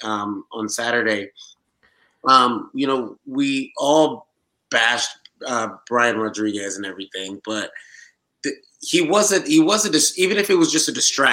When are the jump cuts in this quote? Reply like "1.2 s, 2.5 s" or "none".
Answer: none